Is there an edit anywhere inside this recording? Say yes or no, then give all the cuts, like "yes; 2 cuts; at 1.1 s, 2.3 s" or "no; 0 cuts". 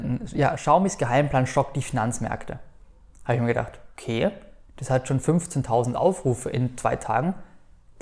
no; 0 cuts